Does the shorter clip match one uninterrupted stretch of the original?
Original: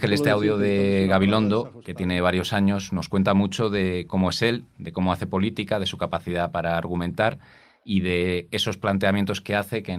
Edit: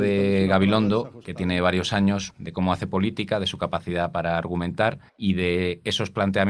no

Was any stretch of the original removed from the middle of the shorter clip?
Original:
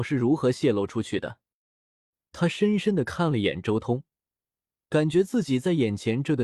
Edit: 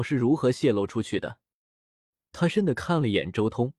yes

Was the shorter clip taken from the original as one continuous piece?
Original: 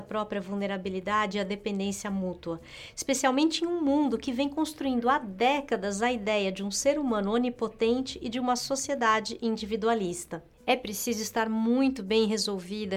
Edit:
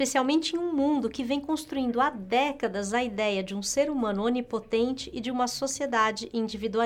yes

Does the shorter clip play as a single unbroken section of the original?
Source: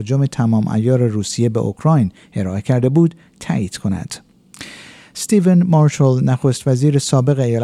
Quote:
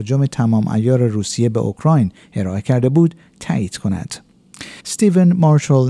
no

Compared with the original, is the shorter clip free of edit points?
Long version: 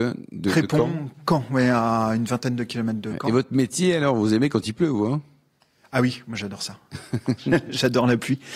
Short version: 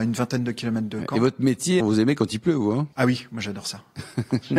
no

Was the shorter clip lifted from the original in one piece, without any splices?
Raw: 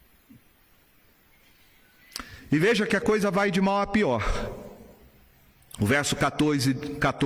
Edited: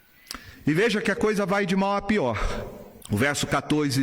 no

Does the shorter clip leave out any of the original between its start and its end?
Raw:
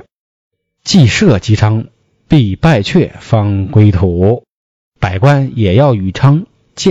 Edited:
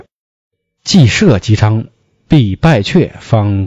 no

